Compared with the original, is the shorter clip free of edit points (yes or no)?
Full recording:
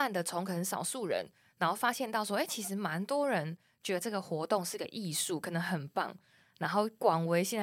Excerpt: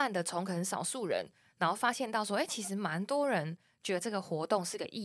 yes